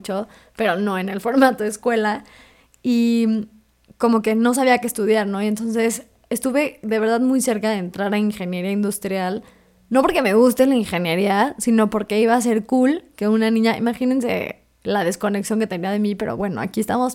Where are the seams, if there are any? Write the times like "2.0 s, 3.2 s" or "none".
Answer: none